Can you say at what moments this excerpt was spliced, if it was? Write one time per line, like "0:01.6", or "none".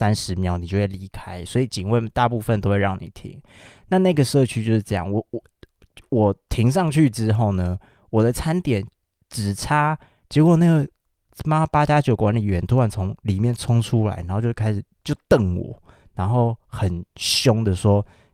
0:10.2